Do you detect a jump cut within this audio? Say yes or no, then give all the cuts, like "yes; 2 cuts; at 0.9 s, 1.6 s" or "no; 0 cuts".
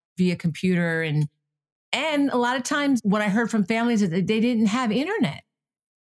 no; 0 cuts